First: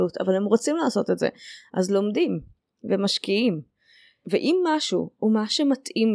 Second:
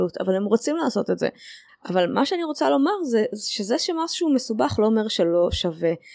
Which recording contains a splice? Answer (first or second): second